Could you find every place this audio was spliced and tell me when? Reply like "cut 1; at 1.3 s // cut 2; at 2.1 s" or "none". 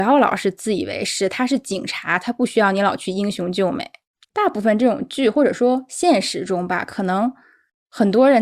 none